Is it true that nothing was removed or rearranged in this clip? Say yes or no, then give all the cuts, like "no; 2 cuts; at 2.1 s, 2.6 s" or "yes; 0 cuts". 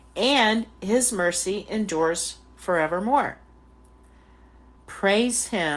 no; 1 cut; at 4.8 s